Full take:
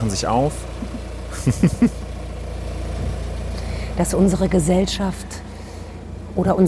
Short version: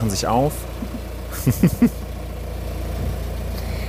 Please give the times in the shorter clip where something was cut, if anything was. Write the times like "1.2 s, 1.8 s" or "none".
none